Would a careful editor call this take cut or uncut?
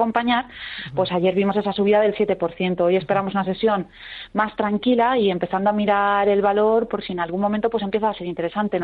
uncut